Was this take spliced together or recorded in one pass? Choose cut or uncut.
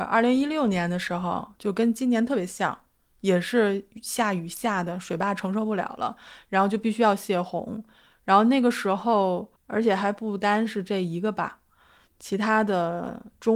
cut